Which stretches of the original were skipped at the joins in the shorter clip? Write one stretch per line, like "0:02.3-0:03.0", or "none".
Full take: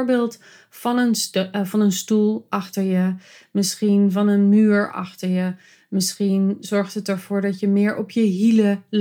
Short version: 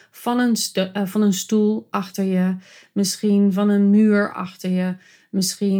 none